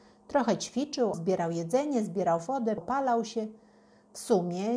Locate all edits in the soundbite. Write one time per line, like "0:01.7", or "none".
0:01.1
0:02.8